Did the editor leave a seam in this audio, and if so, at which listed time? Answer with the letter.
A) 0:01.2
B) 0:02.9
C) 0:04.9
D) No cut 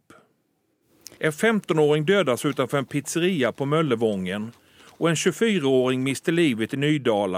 A